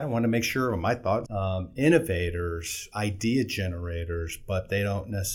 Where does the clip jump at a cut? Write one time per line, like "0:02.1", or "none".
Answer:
0:01.3